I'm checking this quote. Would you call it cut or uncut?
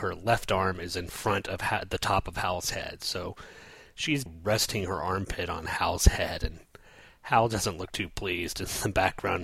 cut